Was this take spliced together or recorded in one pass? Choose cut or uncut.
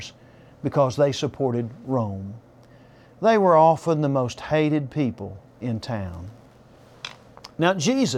uncut